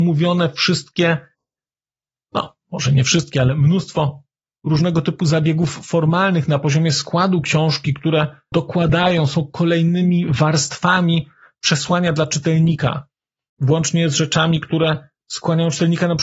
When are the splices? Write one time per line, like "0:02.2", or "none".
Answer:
none